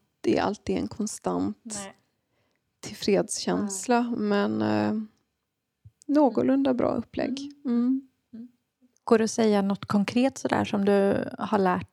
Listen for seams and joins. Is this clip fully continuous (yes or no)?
yes